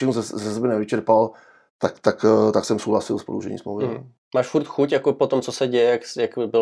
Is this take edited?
no; 0 cuts

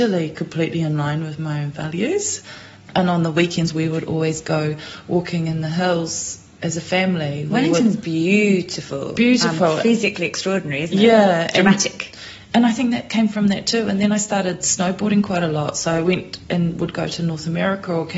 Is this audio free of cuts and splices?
yes; 0 cuts

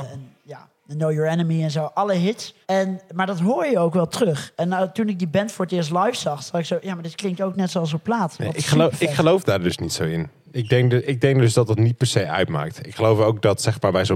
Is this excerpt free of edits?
no; 1 cut; at 2.6 s

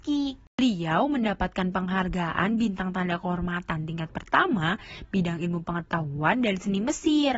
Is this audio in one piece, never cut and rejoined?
yes; 0 cuts

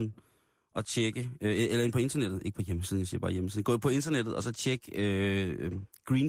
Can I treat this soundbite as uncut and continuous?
yes; 0 cuts

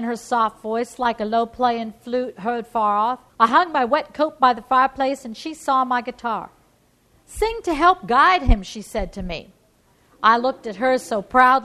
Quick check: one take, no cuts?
no; 1 cut; at 3.3 s

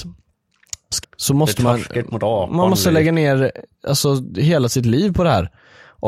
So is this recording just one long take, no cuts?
no; 1 cut; at 1.0 s

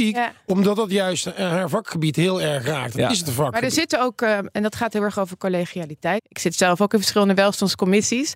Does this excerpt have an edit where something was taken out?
yes; 1 cut; at 6.2 s

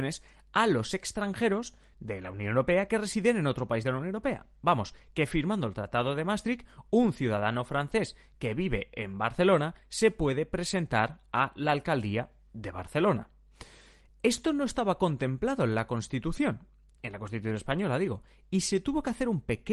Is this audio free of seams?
yes; 0 cuts

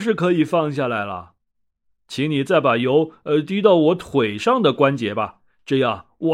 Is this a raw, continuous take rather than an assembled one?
yes; 0 cuts

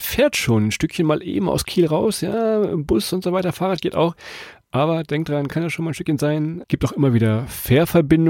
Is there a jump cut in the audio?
yes; 2 cuts; at 5.5 s, 6.6 s

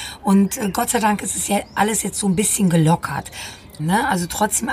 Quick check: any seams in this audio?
yes; 1 cut; at 3.8 s

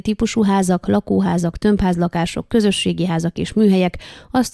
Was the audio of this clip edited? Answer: no; 0 cuts

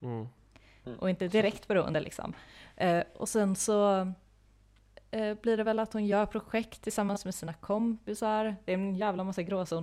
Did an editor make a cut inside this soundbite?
no; 0 cuts

